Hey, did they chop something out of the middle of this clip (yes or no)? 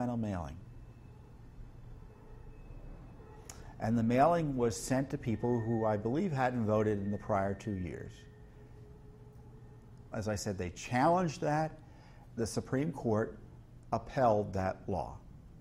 yes